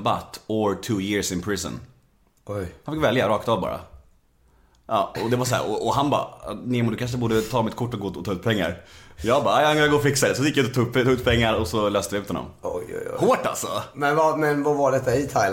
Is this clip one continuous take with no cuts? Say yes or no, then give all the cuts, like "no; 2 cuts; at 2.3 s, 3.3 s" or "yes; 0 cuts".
yes; 0 cuts